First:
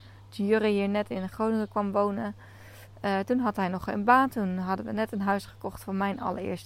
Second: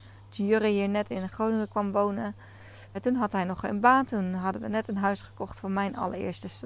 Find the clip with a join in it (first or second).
second